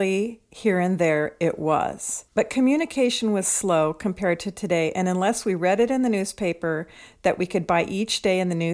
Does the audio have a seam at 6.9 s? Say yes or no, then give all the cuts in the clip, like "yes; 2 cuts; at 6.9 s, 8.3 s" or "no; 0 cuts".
no; 1 cut; at 2.3 s